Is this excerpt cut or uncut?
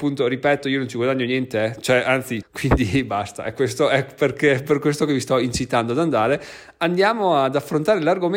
cut